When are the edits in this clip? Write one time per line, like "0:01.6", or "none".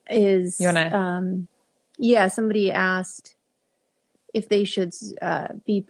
none